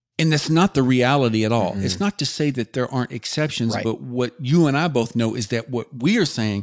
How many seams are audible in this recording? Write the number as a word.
zero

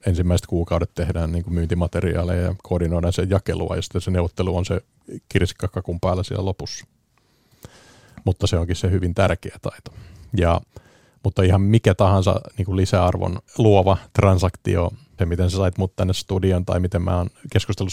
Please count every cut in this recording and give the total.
two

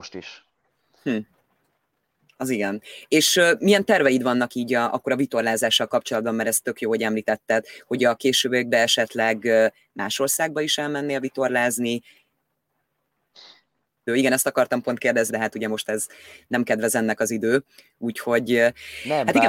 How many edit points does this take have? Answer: two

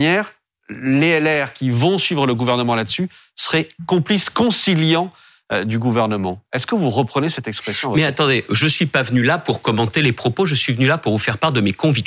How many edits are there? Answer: one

